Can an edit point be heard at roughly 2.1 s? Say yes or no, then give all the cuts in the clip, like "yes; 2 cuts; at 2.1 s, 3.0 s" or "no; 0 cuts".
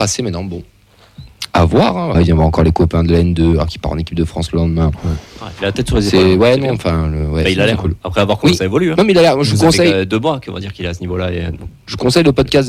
yes; 1 cut; at 2.1 s